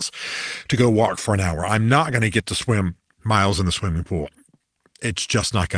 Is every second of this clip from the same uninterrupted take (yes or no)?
yes